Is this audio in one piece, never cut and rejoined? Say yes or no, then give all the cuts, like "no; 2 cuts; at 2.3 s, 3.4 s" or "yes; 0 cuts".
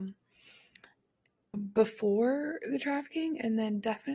no; 1 cut; at 1.5 s